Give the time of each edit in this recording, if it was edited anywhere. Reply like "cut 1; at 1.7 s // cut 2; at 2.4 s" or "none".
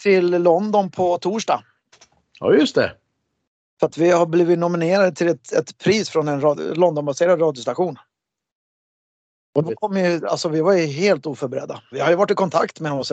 cut 1; at 9.6 s // cut 2; at 11.9 s

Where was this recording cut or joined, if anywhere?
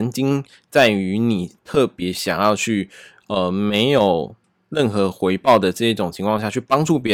none

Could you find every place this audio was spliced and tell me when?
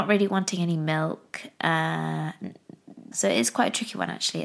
cut 1; at 3.1 s

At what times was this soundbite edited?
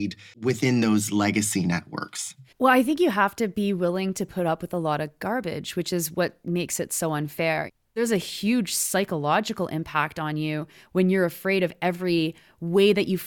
cut 1; at 2.5 s

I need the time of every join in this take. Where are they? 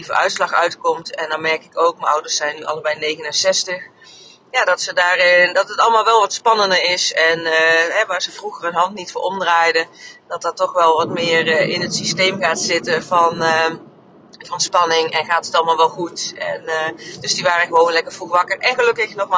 none

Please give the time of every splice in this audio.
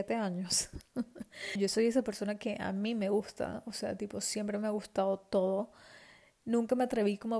cut 1; at 1.6 s

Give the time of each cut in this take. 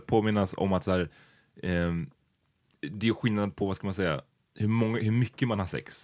none

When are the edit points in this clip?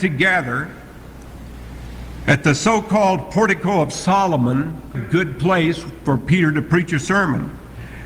cut 1; at 4.9 s

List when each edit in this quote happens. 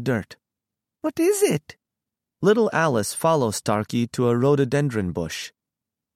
cut 1; at 2.2 s

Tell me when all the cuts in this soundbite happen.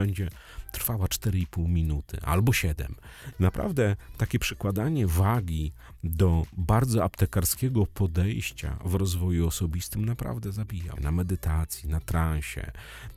cut 1; at 3.3 s // cut 2; at 11.0 s

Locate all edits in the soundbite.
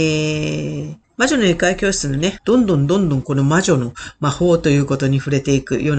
cut 1; at 1.0 s // cut 2; at 2.4 s

